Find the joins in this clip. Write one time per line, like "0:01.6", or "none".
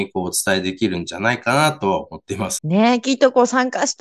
0:02.6